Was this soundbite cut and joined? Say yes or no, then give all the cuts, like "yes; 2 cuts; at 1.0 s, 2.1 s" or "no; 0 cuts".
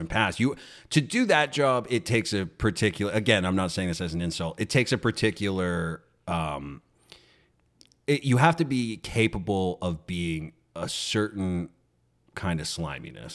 no; 0 cuts